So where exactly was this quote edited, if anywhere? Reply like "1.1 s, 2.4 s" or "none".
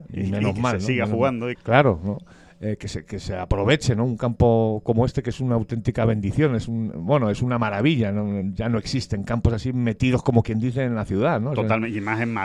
1.5 s